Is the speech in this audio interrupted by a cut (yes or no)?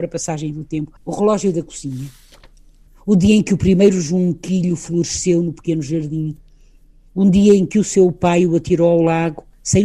yes